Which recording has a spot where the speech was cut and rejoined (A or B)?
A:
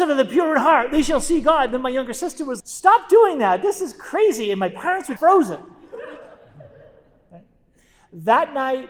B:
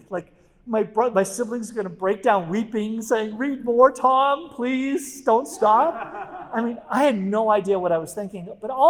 A